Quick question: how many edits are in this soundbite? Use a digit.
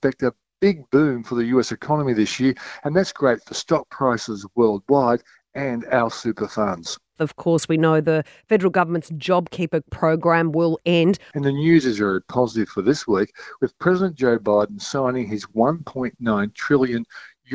2